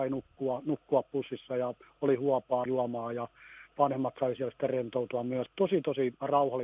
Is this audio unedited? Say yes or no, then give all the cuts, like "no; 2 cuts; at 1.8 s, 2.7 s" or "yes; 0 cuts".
no; 2 cuts; at 2.7 s, 5.5 s